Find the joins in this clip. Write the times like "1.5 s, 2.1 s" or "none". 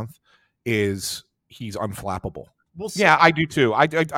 2.7 s